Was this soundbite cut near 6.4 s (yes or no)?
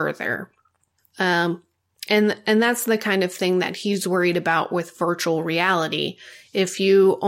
no